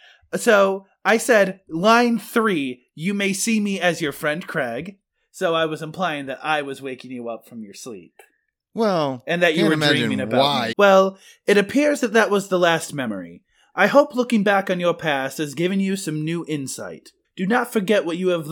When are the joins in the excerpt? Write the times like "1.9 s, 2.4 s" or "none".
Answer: 10.7 s, 17.2 s